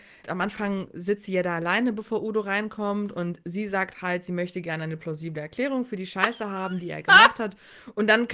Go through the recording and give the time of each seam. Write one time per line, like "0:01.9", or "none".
none